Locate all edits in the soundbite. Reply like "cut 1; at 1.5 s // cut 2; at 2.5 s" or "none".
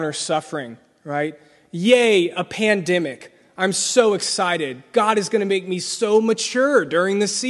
none